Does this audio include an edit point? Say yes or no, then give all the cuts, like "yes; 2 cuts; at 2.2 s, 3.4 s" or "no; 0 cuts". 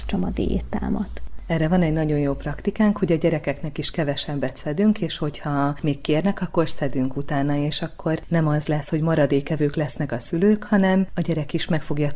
no; 0 cuts